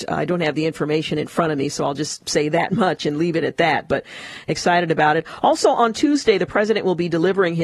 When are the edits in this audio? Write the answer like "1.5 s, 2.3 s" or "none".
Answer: none